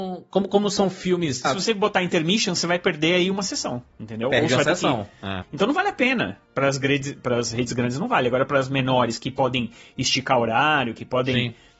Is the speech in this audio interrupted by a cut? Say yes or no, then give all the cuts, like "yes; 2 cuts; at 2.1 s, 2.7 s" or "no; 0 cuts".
yes; 2 cuts; at 1.4 s, 5.4 s